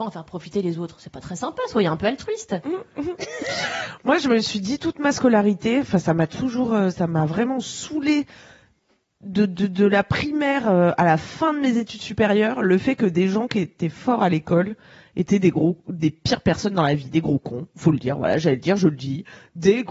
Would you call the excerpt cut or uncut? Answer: uncut